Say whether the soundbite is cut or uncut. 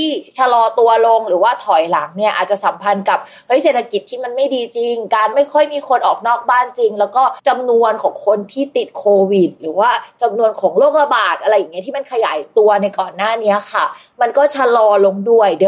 cut